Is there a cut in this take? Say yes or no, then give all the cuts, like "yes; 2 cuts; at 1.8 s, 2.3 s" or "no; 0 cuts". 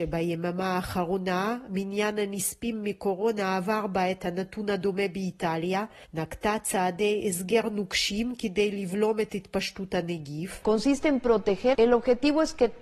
yes; 1 cut; at 11.7 s